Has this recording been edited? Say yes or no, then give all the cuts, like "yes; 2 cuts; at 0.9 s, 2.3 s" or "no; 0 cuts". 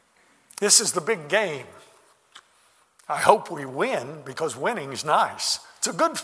no; 0 cuts